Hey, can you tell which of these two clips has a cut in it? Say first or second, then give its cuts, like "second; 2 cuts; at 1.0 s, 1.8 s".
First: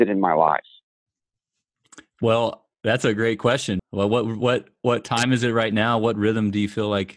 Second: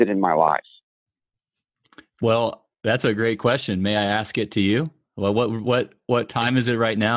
first; 1 cut; at 3.8 s